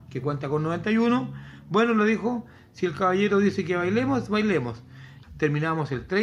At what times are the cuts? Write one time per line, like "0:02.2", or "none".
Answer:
0:05.2

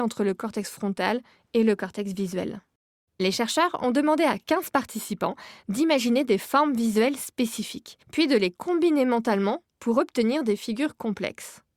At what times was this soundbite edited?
0:03.1
0:08.0

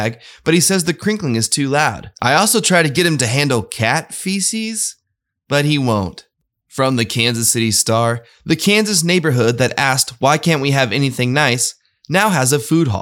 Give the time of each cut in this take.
none

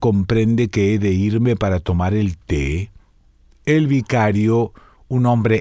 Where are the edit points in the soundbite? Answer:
none

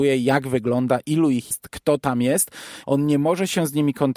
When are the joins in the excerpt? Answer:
0:01.5
0:02.8

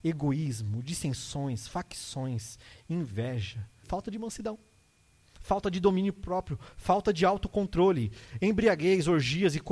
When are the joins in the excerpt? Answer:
0:03.8

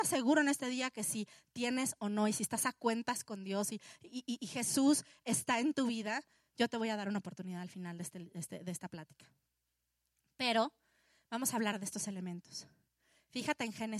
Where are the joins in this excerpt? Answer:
none

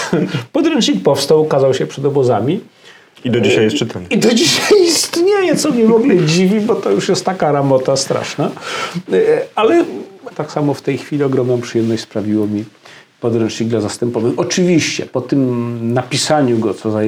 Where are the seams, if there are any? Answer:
0:10.3

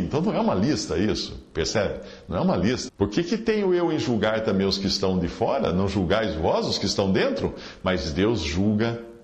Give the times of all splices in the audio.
0:02.9

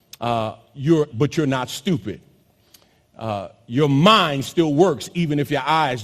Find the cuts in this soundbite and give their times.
0:01.1

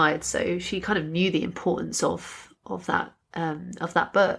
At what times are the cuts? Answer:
none

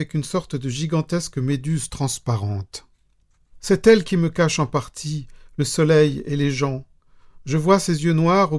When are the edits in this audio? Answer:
none

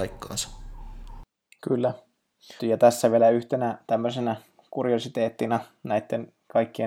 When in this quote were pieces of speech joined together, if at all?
0:02.6

